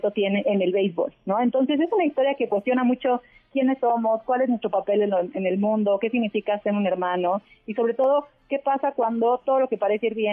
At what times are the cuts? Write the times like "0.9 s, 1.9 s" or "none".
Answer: none